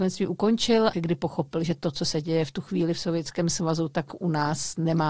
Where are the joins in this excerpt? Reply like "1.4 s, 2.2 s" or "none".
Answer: 0.9 s